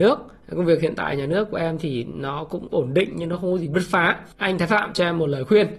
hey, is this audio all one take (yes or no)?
no